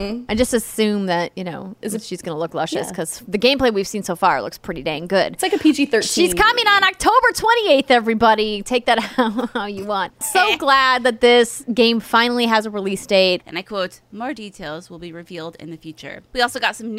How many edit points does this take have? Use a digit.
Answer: 1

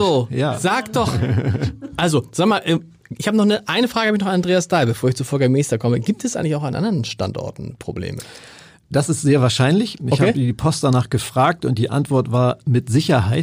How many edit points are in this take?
0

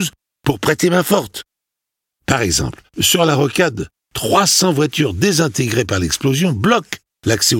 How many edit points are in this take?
1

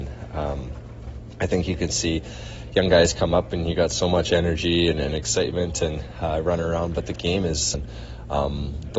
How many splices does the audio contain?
1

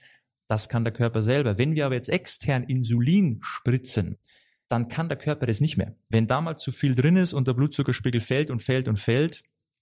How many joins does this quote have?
0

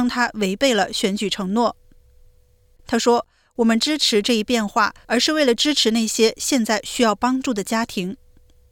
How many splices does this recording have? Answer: 2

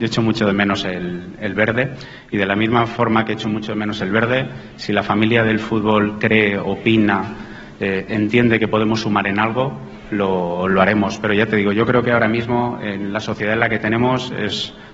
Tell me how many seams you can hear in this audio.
0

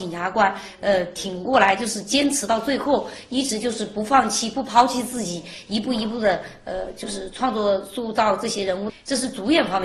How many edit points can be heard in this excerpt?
1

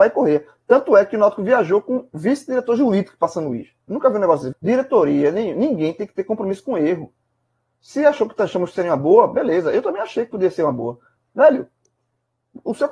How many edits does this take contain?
2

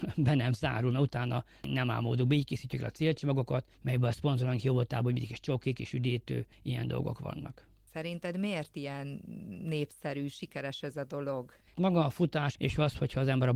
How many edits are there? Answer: 2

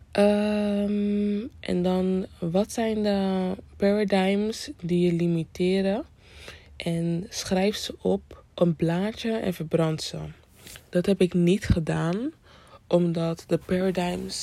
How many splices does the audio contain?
1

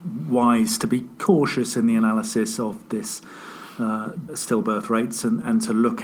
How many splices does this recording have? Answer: 1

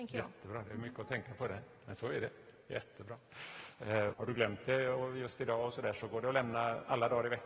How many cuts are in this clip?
1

